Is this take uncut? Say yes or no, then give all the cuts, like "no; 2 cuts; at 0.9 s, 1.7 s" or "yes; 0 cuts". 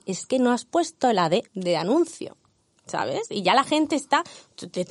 no; 1 cut; at 1.5 s